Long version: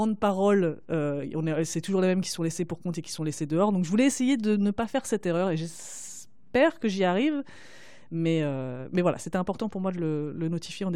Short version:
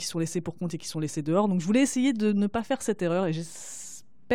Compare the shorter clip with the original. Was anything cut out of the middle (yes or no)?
no